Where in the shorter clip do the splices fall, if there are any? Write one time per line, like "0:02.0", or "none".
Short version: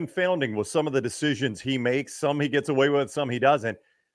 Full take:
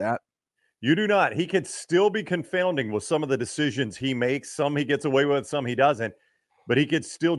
none